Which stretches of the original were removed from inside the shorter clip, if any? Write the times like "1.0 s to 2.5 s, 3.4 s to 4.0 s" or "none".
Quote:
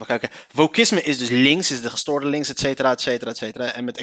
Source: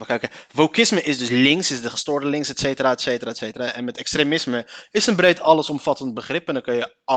none